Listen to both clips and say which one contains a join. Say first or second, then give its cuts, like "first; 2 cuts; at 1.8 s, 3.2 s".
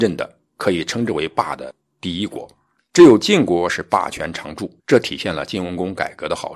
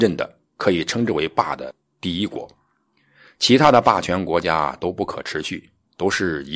first; 2 cuts; at 2.8 s, 4.8 s